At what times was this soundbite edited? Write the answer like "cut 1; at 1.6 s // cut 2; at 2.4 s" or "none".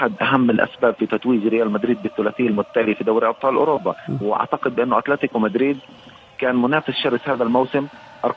cut 1; at 4.2 s